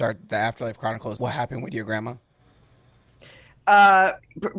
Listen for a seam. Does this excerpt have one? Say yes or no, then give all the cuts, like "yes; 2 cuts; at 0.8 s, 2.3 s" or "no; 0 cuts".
yes; 1 cut; at 1.2 s